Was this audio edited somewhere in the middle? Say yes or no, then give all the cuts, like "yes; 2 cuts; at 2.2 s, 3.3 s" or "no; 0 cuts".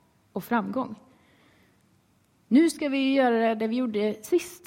no; 0 cuts